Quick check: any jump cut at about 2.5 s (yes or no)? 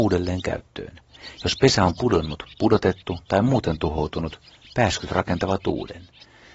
no